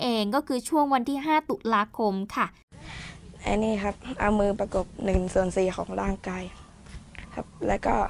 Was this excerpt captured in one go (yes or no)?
no